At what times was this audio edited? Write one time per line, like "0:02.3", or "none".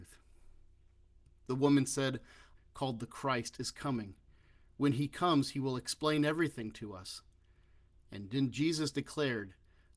0:02.6